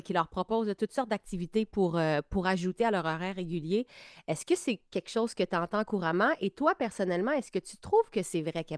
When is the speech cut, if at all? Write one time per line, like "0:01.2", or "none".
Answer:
none